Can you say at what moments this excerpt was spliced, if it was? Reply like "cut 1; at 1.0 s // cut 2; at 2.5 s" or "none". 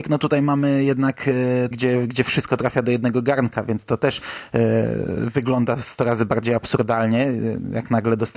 cut 1; at 1.7 s